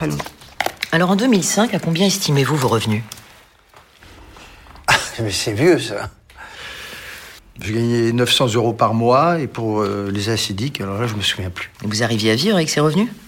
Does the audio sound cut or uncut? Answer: cut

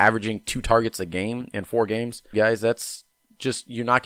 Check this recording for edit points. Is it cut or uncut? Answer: cut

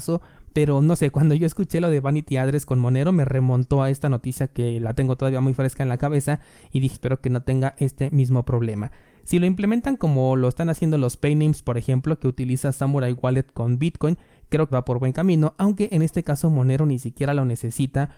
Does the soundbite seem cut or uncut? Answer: cut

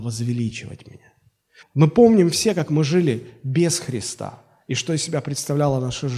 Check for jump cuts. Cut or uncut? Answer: cut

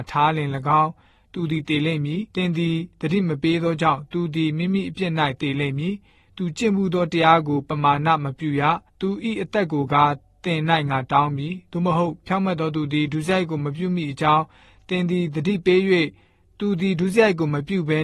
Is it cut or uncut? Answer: cut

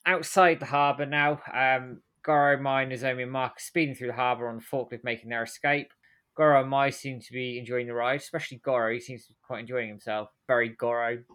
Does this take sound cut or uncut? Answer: uncut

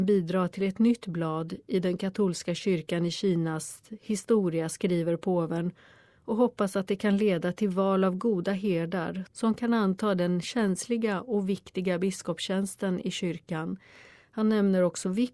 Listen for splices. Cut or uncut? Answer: uncut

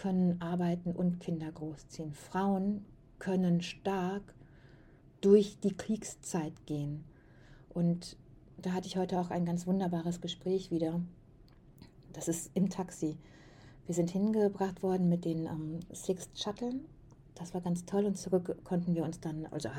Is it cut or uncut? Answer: uncut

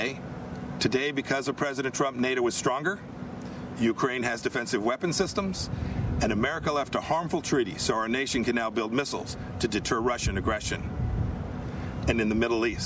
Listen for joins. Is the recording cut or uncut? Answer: uncut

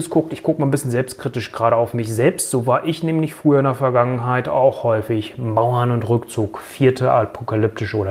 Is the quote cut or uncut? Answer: uncut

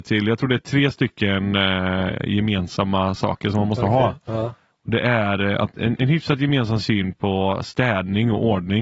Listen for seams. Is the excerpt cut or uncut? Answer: uncut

